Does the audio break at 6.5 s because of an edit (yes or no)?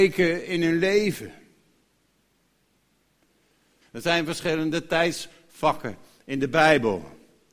no